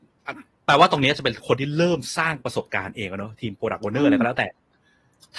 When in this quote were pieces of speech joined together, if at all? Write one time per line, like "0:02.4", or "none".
none